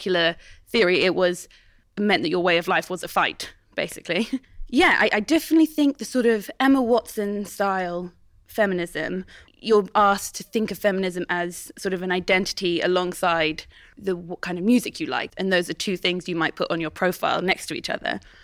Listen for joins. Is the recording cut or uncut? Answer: cut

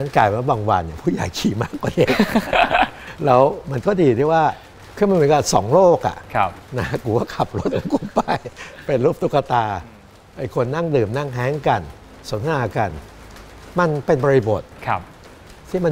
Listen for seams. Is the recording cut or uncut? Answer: uncut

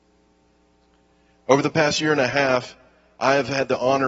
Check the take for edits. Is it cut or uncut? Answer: uncut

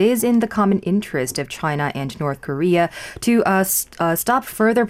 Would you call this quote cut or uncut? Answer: uncut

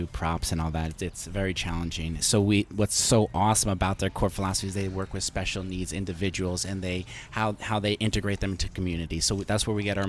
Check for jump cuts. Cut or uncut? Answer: cut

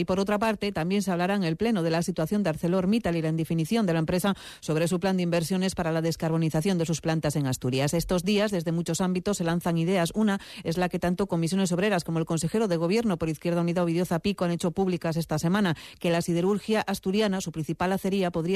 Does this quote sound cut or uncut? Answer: uncut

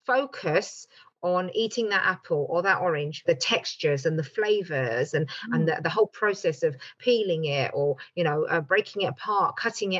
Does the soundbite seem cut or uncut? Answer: uncut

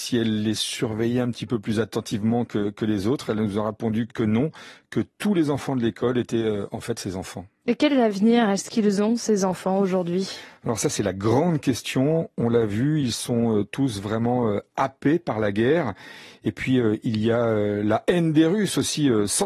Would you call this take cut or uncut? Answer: cut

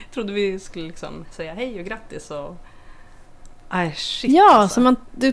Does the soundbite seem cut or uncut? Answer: uncut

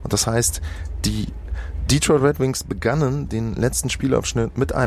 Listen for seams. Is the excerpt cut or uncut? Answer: uncut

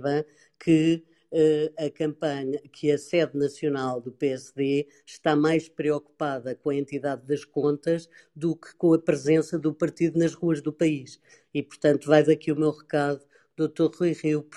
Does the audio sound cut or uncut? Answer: uncut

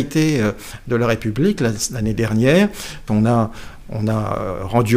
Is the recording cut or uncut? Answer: cut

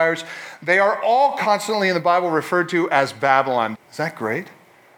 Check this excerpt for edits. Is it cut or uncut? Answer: cut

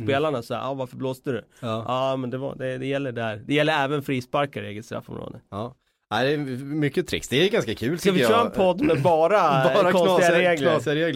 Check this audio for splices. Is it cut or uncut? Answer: uncut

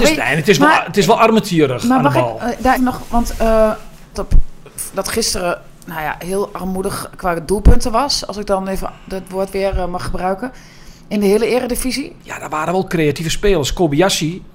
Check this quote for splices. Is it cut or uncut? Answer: cut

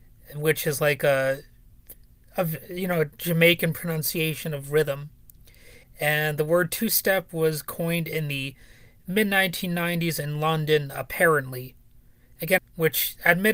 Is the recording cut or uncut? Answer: cut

